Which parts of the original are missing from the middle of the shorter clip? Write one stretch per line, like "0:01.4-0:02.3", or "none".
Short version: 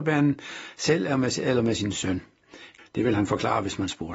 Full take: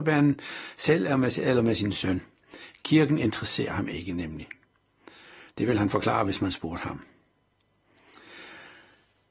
0:02.8-0:05.4